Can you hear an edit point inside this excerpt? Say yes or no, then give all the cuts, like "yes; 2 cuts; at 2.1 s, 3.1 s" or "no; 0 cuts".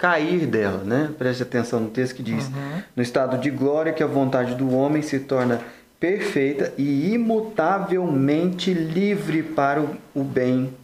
no; 0 cuts